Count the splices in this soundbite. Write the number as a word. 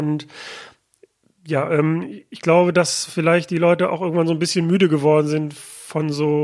zero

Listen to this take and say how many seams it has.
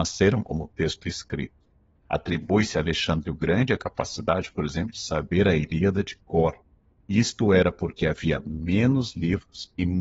zero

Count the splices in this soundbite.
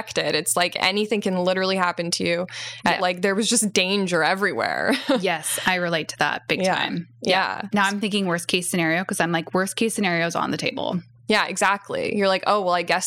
one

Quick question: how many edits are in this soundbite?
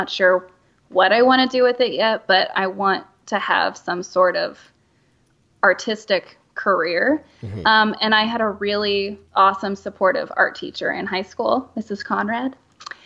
zero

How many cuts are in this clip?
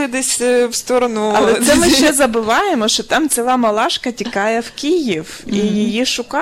zero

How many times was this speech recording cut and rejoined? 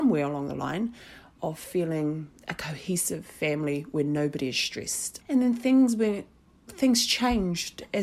one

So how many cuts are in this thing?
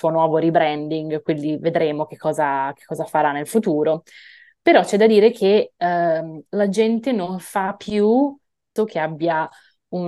one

